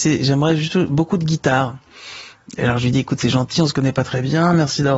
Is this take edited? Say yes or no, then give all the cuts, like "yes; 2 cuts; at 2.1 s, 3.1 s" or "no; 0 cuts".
no; 0 cuts